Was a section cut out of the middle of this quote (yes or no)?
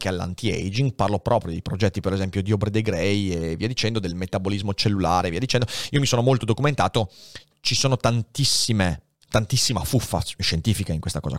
no